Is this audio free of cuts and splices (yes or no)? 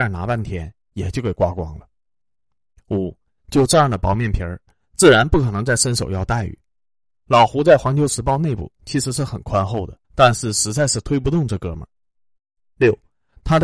no